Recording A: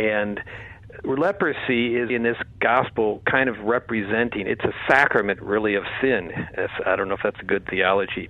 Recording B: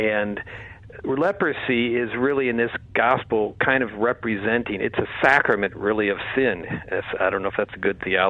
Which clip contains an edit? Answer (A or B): A